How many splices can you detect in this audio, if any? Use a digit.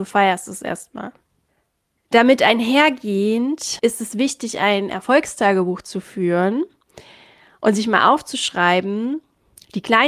0